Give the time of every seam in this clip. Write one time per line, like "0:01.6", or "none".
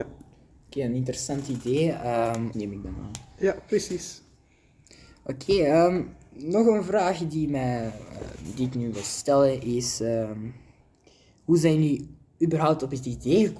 0:02.5